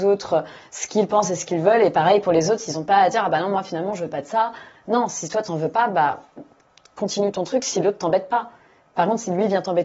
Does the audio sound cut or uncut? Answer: uncut